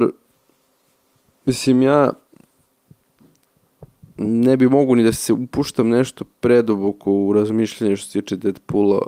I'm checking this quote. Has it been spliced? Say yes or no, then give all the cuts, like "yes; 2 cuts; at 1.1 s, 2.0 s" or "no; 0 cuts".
no; 0 cuts